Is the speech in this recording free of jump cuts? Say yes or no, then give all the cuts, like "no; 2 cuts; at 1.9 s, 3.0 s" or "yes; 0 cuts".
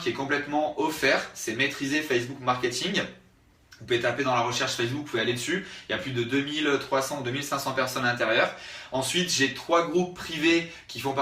yes; 0 cuts